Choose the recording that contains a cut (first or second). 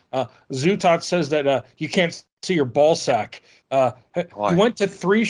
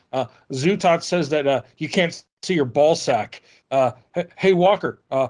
first